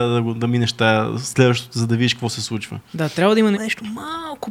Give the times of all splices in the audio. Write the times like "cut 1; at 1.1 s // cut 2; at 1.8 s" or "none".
cut 1; at 3.5 s